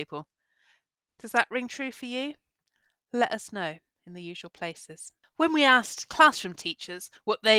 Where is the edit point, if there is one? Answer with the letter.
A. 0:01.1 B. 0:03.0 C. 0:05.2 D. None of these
A